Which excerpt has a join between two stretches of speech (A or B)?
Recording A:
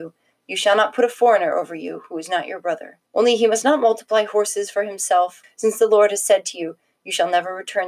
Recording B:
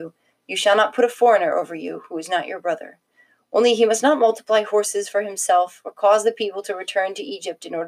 A